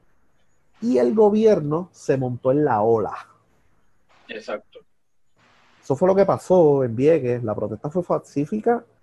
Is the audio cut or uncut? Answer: uncut